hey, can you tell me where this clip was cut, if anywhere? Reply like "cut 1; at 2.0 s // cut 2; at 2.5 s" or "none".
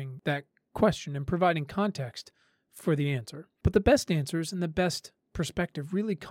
none